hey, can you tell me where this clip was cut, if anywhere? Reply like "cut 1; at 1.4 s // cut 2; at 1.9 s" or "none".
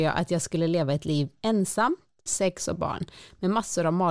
cut 1; at 2.3 s